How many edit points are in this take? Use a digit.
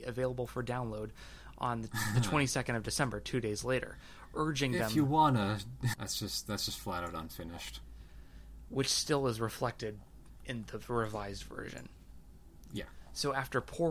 1